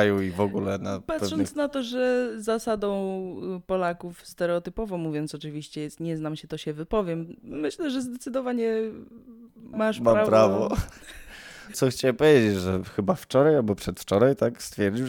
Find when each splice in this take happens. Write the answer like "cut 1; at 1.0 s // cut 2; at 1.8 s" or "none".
cut 1; at 11.7 s